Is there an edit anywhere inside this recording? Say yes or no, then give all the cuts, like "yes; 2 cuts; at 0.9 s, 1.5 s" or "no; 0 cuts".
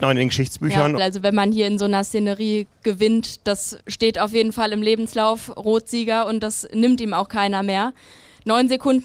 yes; 2 cuts; at 1.0 s, 3.8 s